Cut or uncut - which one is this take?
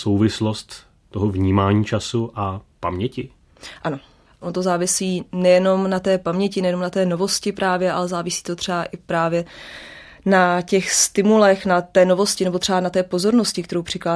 uncut